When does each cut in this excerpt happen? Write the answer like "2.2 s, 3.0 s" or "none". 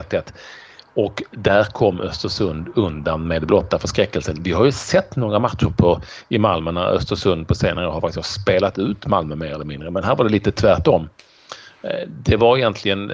none